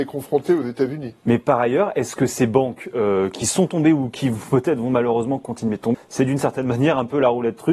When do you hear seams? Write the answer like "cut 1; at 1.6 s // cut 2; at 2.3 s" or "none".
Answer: cut 1; at 5.9 s